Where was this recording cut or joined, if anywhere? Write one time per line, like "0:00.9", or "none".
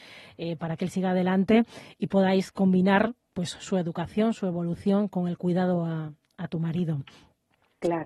none